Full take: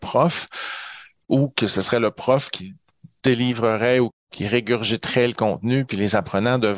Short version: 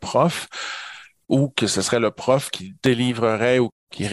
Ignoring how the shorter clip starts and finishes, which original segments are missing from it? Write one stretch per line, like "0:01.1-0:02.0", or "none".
0:02.8-0:03.2